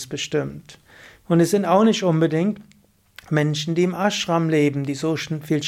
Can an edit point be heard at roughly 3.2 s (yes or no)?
no